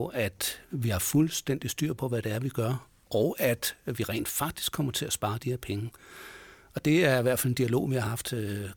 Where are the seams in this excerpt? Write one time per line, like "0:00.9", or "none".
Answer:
none